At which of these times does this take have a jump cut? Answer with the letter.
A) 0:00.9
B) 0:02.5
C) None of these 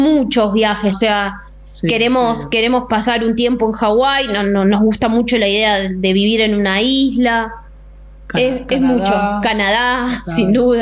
A